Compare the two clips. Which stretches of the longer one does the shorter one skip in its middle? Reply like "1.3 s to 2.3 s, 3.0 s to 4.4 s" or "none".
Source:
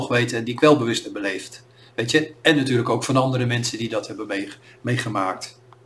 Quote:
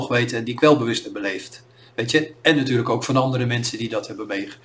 none